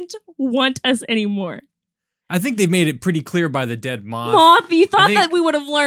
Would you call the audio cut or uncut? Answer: uncut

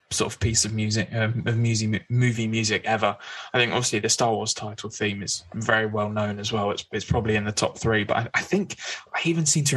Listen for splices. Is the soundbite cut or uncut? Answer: uncut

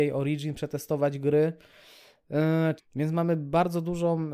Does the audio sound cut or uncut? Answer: cut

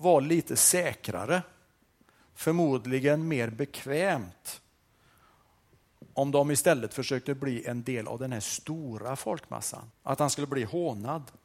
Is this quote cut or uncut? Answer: cut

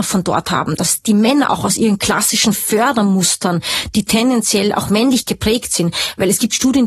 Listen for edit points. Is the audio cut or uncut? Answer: uncut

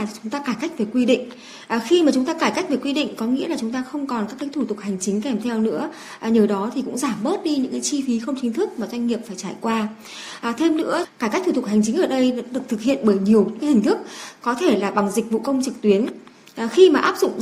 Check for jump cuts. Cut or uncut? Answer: uncut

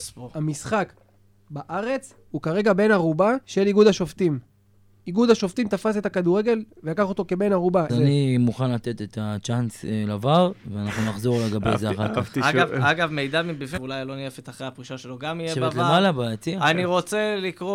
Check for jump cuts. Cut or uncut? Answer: cut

